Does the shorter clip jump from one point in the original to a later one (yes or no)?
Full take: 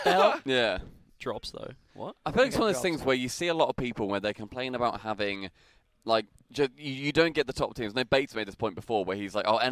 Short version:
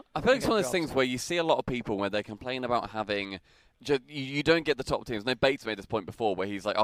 yes